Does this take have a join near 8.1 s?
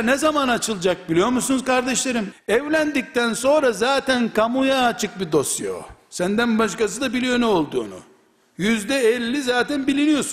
no; 1 cut; at 2.3 s

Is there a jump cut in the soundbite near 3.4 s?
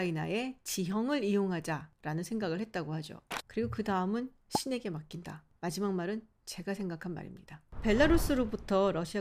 yes; 1 cut; at 3.4 s

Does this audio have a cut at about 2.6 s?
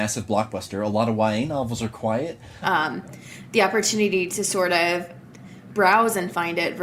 yes; 1 cut; at 2.6 s

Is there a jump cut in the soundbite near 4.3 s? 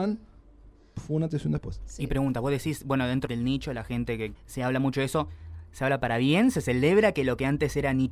yes; 2 cuts; at 3.3 s, 4.3 s

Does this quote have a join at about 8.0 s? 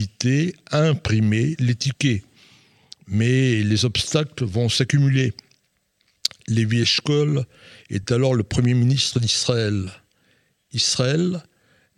no; 0 cuts

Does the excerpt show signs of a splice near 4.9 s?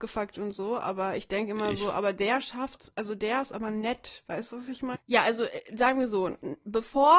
yes; 1 cut; at 4.9 s

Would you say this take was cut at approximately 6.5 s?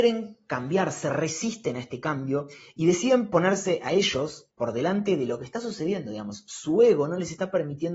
no; 1 cut; at 4.5 s

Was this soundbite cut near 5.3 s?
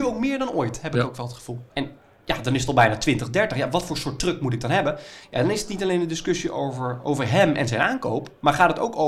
no; 1 cut; at 1.7 s

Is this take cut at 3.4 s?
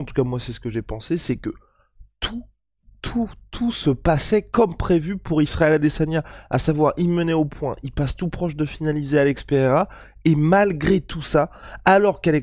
yes; 1 cut; at 3.4 s

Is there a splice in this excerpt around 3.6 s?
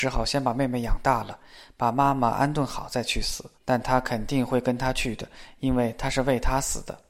yes; 1 cut; at 3.6 s

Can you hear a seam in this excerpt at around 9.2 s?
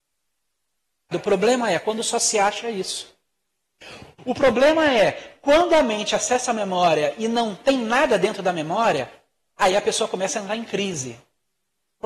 no; 2 cuts; at 1.1 s, 4.1 s

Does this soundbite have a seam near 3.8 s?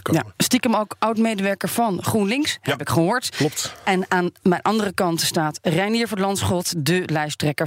no; 0 cuts

